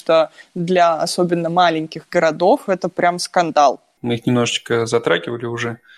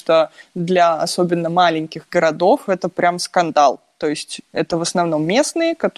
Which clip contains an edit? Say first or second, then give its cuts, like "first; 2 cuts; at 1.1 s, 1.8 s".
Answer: first; 1 cut; at 4.0 s